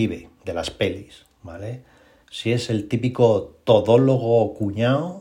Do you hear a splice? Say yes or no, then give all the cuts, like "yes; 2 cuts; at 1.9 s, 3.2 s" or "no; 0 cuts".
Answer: yes; 1 cut; at 2.2 s